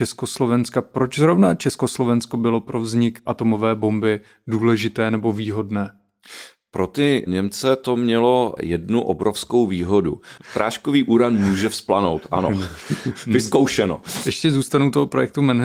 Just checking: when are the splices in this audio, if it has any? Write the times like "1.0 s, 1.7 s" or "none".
10.4 s